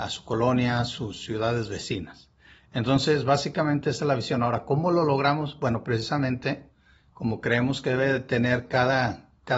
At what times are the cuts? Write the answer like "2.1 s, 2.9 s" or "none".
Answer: none